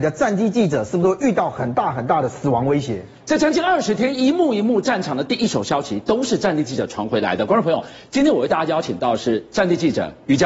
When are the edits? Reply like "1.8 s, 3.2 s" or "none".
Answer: none